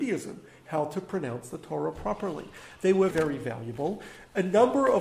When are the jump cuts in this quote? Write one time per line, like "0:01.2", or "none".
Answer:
0:03.1